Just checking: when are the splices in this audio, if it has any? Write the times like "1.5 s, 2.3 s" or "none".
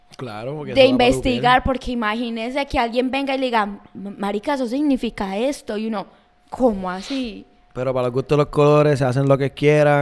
none